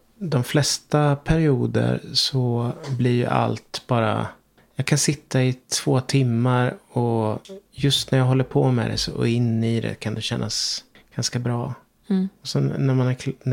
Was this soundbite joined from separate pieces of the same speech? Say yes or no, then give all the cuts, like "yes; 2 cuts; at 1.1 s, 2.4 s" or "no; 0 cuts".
no; 0 cuts